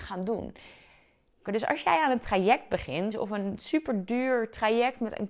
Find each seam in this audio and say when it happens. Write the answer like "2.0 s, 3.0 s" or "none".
1.5 s, 3.1 s

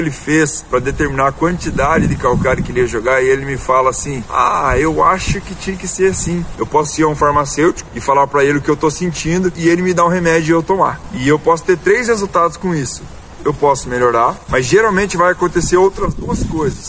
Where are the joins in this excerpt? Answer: 6.5 s

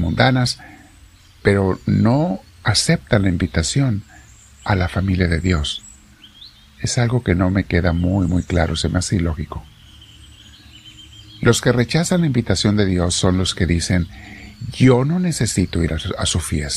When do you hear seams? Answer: none

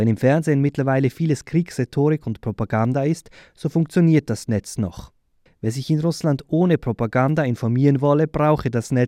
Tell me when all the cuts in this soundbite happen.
5.5 s

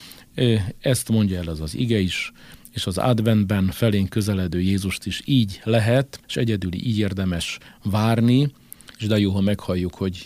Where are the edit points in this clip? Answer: 6.2 s, 8.9 s

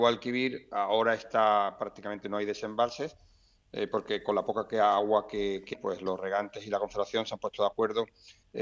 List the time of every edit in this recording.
5.7 s

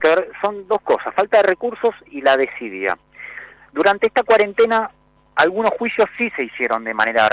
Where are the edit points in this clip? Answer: none

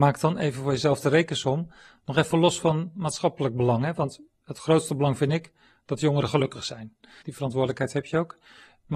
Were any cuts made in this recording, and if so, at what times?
7.2 s

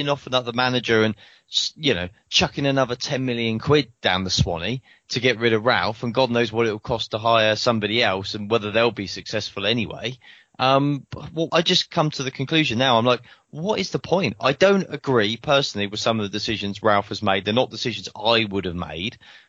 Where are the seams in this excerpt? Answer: 11.5 s

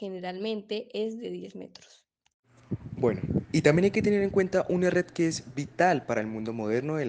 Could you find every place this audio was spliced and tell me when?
none

